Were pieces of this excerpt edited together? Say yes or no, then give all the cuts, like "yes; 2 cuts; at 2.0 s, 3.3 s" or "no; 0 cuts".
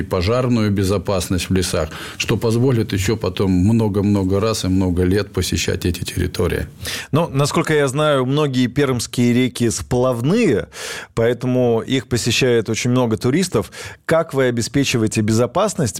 no; 0 cuts